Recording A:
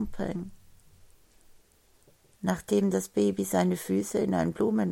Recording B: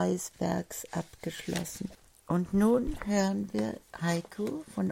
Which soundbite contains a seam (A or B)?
B